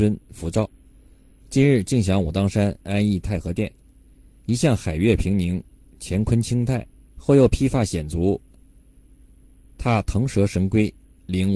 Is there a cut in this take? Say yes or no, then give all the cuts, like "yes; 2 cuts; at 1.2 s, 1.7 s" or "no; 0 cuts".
yes; 1 cut; at 7.1 s